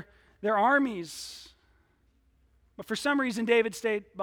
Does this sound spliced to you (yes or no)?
no